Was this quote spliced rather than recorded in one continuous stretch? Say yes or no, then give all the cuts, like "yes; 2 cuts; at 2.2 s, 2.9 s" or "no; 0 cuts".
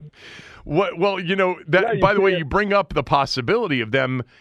no; 0 cuts